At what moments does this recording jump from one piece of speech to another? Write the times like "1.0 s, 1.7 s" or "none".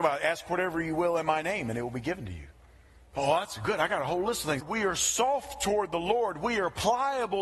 4.6 s